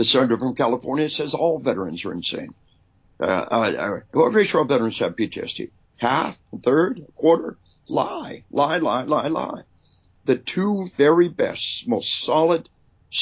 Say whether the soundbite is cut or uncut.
cut